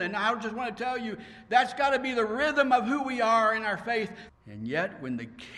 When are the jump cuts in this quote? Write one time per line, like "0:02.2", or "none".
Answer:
0:04.3